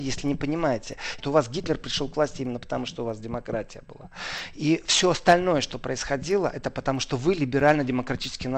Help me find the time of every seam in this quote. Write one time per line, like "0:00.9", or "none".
0:01.2